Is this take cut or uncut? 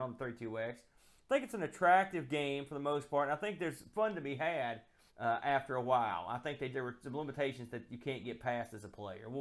cut